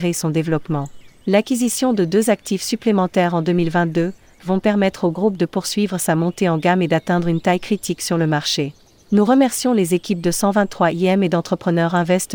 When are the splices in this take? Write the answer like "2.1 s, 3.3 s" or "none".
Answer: 4.4 s